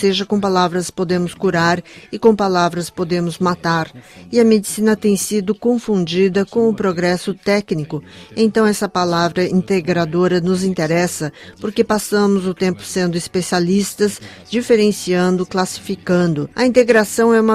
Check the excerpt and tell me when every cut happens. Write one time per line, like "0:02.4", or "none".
0:16.5